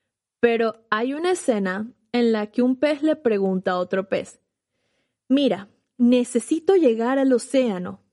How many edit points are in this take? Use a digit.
0